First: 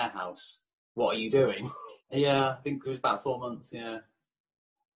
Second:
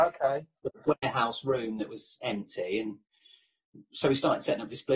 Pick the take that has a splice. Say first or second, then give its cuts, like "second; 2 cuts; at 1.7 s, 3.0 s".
first; 1 cut; at 2.0 s